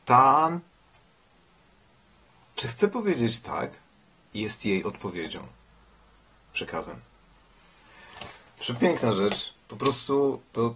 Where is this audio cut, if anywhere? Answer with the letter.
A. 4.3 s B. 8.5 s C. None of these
A